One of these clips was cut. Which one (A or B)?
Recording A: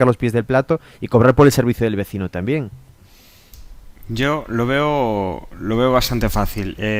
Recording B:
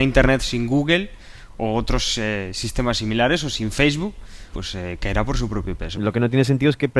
B